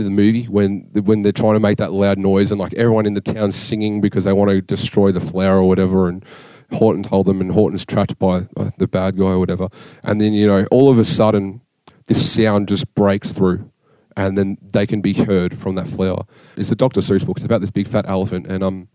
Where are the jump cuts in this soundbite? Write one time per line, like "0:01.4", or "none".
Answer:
0:16.6